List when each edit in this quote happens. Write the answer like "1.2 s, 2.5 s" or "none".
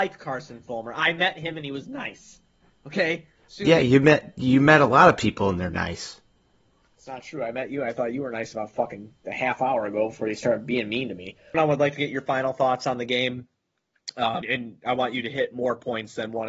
11.5 s, 14.4 s